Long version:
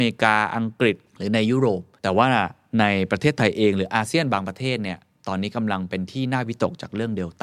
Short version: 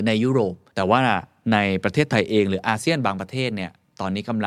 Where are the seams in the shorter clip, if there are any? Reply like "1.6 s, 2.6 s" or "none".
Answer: none